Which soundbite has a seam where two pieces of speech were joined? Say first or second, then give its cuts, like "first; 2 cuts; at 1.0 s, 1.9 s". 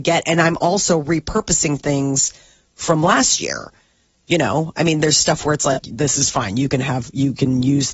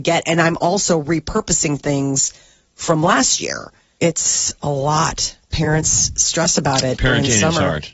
second; 1 cut; at 4.0 s